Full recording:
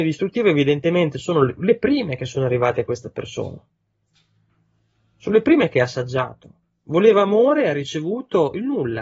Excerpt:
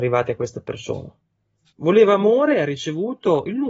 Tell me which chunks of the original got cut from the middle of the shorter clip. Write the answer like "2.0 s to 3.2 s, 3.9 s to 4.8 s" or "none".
4.2 s to 6.8 s